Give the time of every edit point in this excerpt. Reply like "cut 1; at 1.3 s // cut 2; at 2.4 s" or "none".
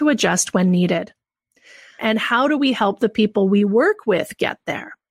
cut 1; at 2.0 s